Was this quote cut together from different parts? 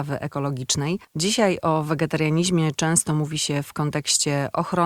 yes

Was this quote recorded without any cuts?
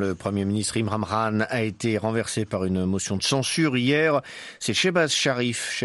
yes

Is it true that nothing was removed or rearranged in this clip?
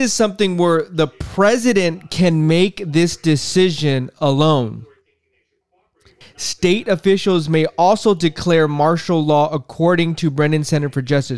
no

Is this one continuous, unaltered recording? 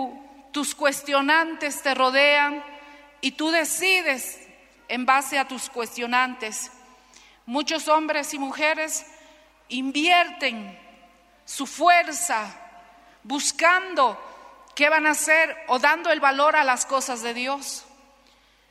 yes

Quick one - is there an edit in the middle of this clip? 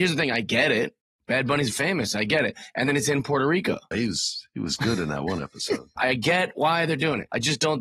yes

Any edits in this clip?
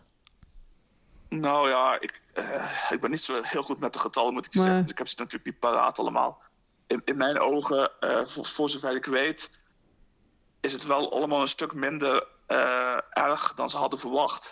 no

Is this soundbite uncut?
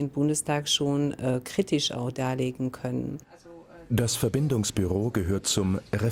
yes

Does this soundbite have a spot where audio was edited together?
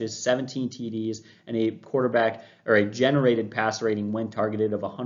no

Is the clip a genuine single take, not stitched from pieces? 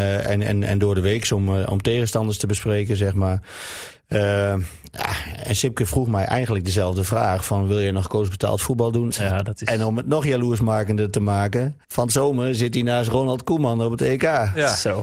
no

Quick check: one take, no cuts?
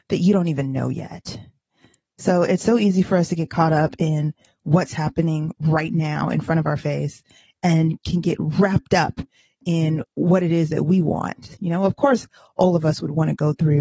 yes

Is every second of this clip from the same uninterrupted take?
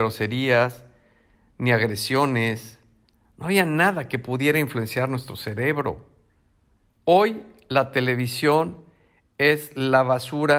no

